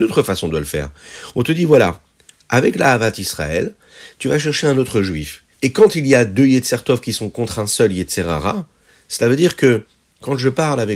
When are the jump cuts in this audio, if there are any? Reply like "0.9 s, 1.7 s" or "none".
5.5 s